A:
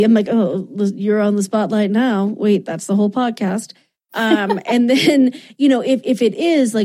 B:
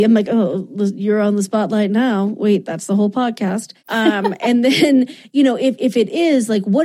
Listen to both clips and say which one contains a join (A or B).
B